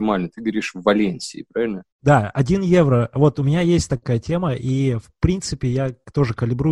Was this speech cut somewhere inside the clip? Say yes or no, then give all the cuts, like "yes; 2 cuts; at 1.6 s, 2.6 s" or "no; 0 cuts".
yes; 1 cut; at 1.9 s